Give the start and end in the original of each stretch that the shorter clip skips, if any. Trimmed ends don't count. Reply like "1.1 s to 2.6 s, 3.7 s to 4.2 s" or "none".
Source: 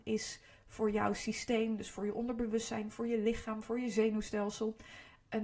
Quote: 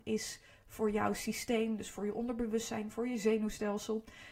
2.9 s to 3.6 s